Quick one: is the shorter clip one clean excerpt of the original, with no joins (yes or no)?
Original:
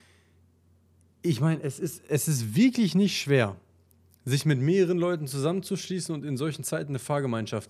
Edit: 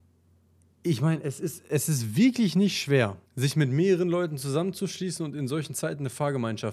no